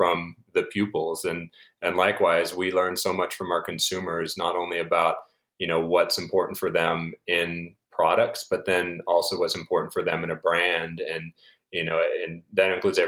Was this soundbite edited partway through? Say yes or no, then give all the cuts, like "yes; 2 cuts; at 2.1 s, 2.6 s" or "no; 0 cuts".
no; 0 cuts